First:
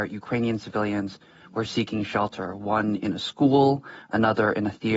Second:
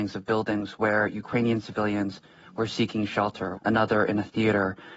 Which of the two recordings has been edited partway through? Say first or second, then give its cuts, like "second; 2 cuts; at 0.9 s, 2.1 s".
second; 1 cut; at 3.6 s